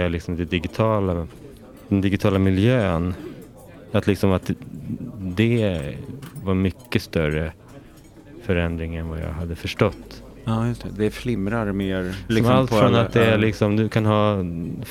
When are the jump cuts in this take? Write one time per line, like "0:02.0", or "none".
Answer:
0:12.3